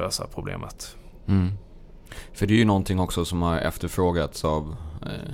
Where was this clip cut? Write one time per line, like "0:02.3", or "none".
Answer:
none